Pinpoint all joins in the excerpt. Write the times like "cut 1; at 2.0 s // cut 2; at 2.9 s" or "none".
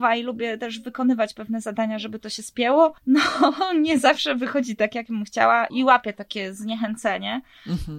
cut 1; at 3.0 s // cut 2; at 5.7 s